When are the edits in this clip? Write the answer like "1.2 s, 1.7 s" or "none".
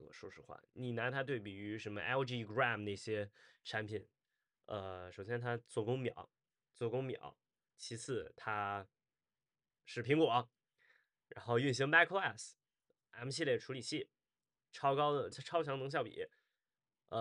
15.3 s